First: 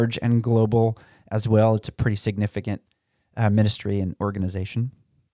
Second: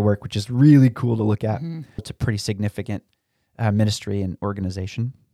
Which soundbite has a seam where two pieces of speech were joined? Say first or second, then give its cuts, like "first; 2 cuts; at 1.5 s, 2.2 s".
second; 1 cut; at 2.0 s